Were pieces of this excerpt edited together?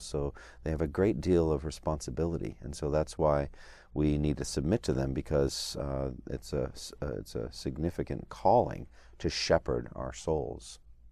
no; 0 cuts

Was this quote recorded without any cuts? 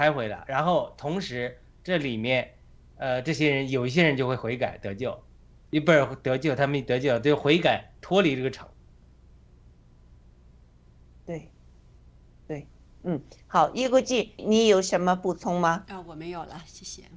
no; 1 cut; at 14.4 s

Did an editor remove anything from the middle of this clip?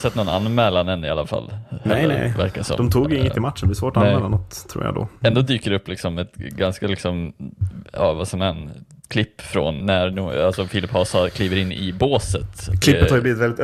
yes; 1 cut; at 9.8 s

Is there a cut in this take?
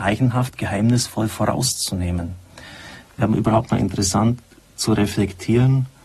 no; 0 cuts

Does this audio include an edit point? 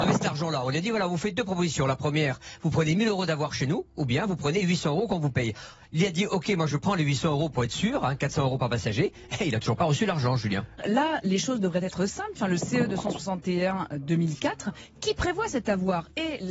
yes; 2 cuts; at 10.8 s, 12.3 s

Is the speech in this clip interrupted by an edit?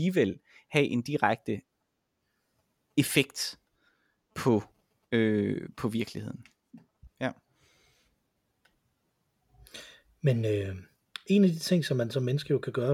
yes; 1 cut; at 7.1 s

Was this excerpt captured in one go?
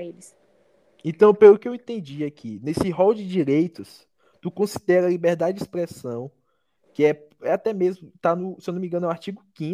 yes; 0 cuts

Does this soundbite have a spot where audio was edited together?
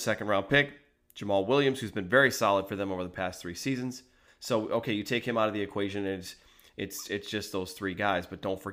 yes; 1 cut; at 4.3 s

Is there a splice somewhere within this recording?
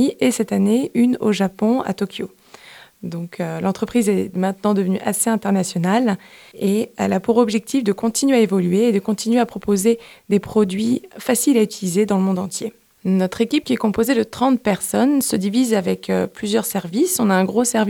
no; 0 cuts

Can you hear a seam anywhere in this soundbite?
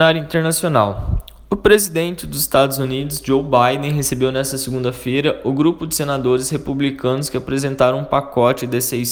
no; 0 cuts

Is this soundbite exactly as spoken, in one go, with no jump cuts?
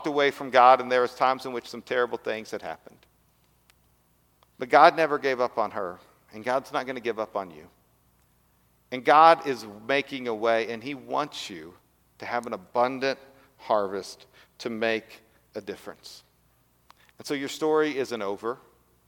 yes; 0 cuts

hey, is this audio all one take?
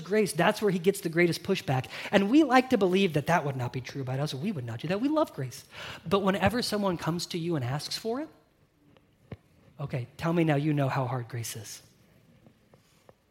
yes; 0 cuts

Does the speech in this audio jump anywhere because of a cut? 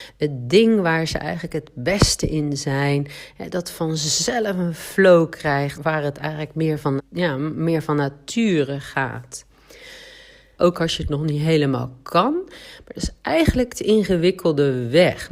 yes; 3 cuts; at 5.7 s, 7.0 s, 10.6 s

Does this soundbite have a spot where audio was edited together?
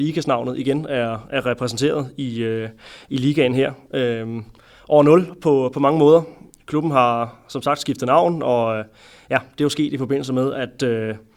no; 0 cuts

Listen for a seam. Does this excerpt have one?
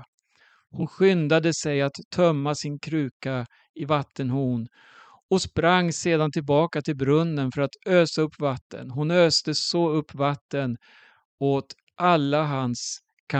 no; 0 cuts

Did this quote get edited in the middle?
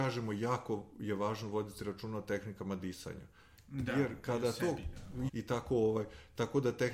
yes; 1 cut; at 5.3 s

